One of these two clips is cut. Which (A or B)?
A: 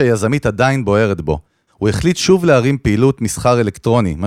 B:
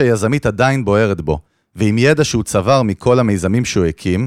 A